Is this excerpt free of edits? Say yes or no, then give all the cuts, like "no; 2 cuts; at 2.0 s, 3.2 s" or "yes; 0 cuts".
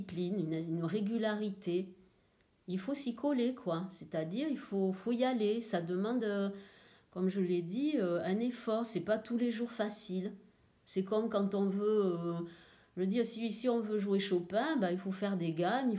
yes; 0 cuts